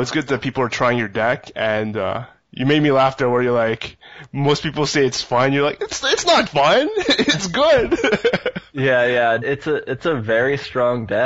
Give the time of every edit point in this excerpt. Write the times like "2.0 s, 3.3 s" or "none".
6.5 s, 9.4 s